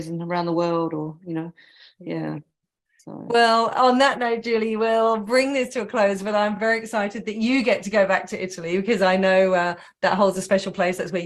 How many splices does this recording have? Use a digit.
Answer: 0